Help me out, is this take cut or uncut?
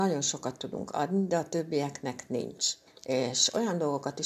cut